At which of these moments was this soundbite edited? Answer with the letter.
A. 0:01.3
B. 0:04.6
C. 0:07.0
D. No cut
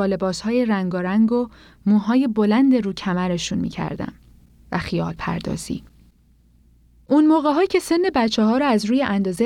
B